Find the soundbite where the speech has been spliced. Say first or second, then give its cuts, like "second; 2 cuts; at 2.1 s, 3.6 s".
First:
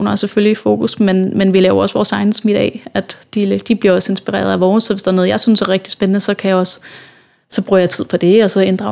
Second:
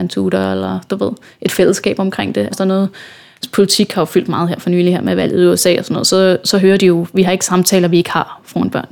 second; 1 cut; at 2.5 s